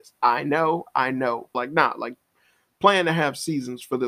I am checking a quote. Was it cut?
yes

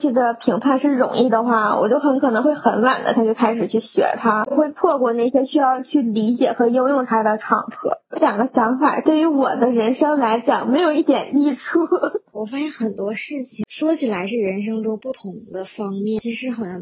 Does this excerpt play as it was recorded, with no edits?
no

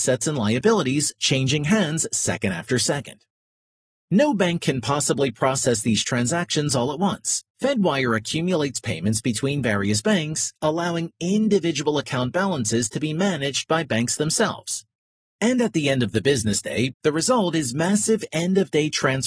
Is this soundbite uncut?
no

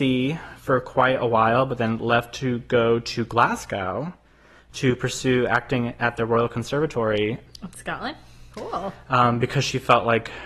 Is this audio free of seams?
no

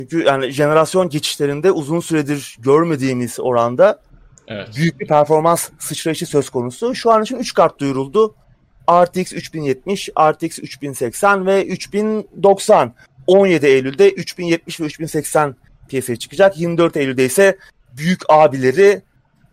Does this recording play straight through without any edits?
yes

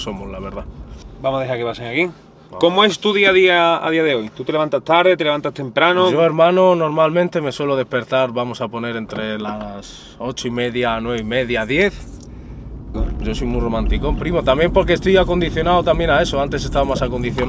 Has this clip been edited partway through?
yes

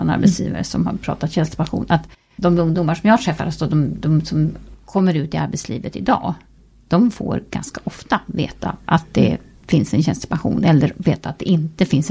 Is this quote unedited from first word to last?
yes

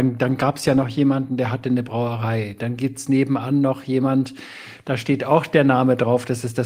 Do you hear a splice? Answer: no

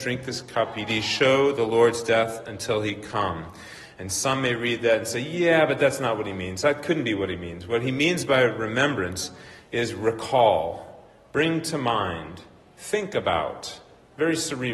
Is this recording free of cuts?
yes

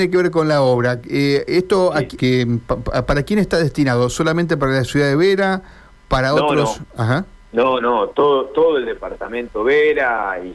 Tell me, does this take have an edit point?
yes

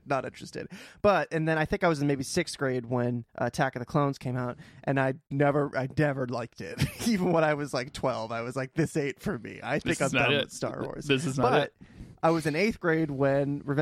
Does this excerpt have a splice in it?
yes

